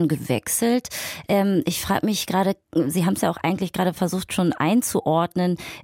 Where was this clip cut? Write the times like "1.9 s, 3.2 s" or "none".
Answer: none